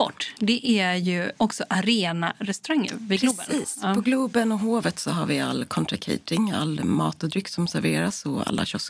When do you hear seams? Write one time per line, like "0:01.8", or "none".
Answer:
0:01.4